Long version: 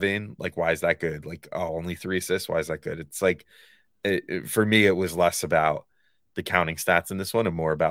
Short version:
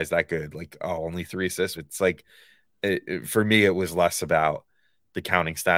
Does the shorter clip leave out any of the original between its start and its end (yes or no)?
yes